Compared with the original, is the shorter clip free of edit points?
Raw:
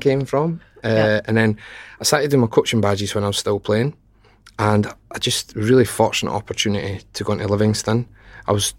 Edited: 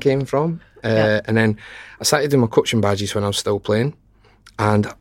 yes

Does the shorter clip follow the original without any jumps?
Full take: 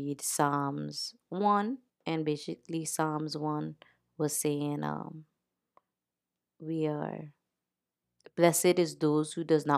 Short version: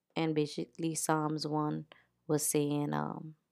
yes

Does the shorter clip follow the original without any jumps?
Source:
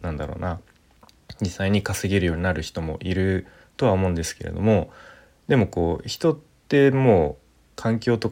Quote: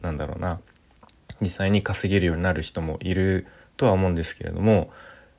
yes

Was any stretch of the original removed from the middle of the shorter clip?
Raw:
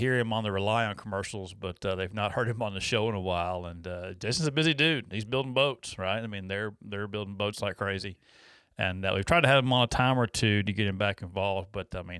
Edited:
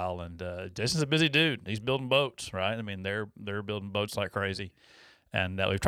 no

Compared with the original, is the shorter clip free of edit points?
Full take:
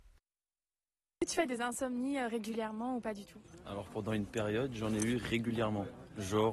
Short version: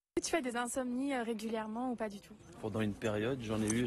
no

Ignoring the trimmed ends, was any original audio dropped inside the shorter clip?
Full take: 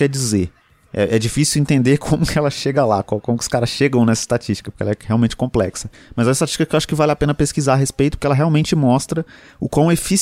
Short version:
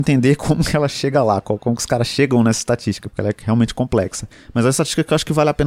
no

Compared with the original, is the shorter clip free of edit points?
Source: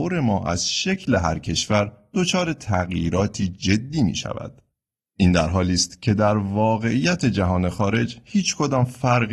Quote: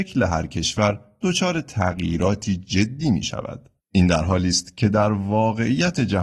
no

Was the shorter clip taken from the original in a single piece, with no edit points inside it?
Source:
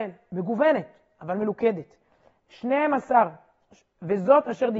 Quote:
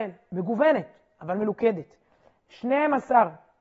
yes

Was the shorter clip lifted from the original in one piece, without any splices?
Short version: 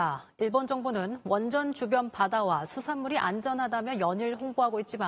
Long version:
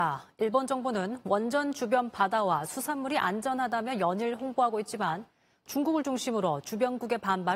yes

